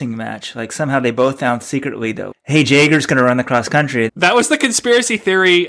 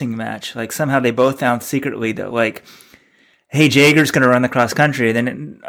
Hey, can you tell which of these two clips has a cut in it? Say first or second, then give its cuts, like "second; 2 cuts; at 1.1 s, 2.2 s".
first; 2 cuts; at 2.3 s, 4.1 s